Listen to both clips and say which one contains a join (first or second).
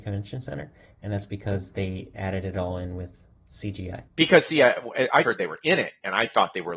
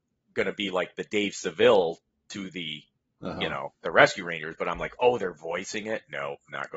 first